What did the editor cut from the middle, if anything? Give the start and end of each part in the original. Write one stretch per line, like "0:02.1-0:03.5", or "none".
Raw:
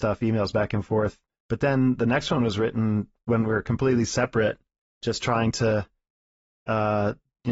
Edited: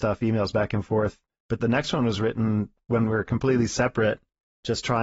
0:01.6-0:02.0